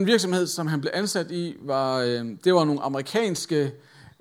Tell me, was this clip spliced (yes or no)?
no